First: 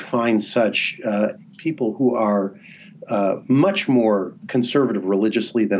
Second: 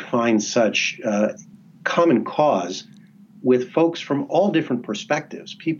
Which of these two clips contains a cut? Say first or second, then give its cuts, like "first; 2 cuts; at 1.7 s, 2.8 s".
first; 1 cut; at 1.5 s